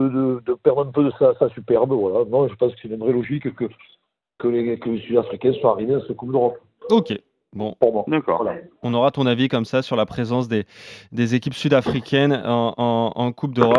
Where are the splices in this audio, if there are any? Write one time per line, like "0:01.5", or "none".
none